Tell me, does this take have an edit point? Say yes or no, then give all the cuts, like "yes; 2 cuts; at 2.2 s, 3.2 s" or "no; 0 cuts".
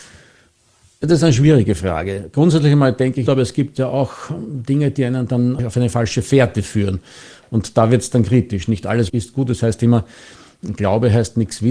yes; 2 cuts; at 3.3 s, 9.1 s